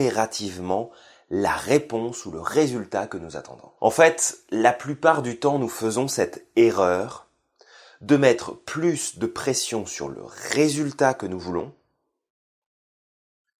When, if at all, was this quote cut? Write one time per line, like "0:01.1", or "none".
0:03.8